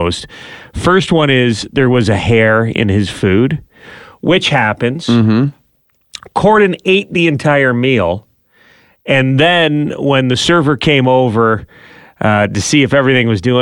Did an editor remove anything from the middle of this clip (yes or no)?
no